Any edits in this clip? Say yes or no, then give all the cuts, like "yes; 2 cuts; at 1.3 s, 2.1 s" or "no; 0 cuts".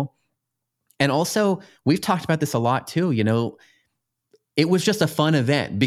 no; 0 cuts